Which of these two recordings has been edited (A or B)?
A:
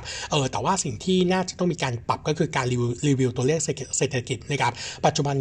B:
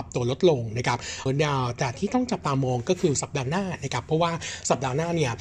B